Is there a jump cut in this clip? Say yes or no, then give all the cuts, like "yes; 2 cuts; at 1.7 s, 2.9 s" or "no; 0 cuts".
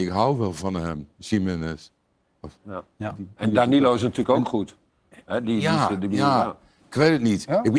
no; 0 cuts